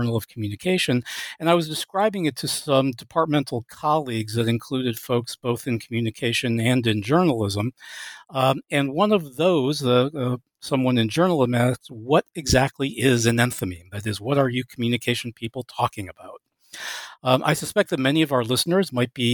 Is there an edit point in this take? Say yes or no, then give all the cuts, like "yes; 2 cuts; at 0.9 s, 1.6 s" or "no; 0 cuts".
no; 0 cuts